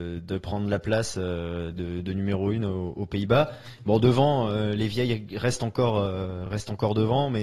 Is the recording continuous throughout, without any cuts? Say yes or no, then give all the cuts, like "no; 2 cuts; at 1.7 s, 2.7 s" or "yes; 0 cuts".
yes; 0 cuts